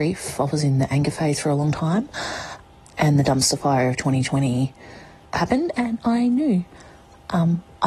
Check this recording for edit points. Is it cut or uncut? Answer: cut